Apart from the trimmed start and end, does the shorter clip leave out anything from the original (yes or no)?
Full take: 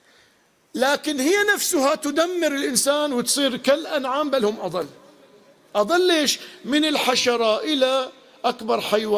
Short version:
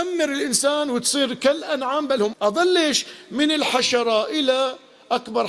yes